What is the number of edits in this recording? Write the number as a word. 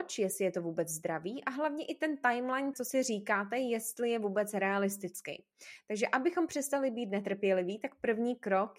one